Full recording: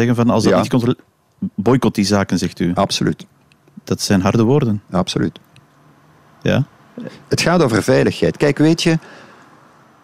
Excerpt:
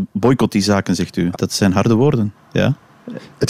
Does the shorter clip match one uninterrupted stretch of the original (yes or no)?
no